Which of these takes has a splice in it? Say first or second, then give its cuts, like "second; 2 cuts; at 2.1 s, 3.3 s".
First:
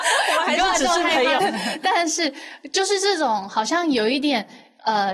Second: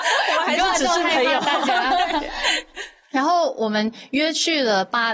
first; 1 cut; at 1.4 s